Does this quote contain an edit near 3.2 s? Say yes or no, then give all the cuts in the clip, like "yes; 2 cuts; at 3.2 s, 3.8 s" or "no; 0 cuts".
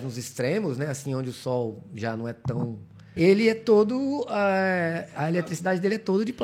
yes; 1 cut; at 3.2 s